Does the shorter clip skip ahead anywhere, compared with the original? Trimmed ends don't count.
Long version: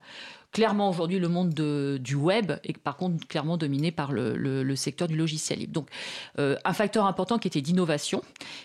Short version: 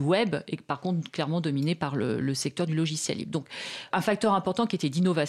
yes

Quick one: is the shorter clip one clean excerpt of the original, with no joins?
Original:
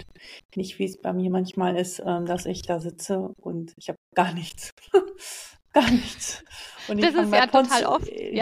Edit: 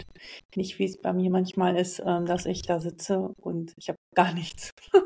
yes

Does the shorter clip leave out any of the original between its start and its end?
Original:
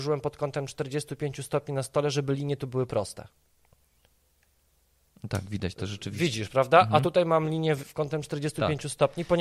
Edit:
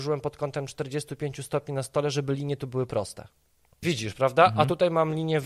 yes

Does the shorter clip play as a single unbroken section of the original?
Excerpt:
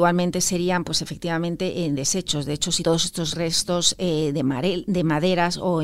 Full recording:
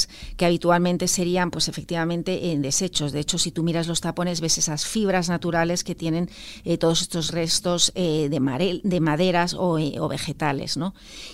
no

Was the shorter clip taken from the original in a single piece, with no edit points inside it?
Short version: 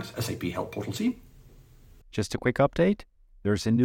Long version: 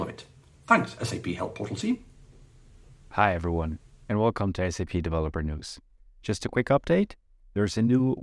no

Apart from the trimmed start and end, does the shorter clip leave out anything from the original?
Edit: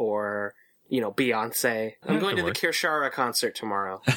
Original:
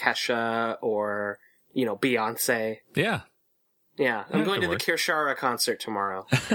yes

